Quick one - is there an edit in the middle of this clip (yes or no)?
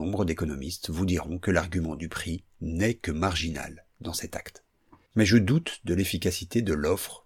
yes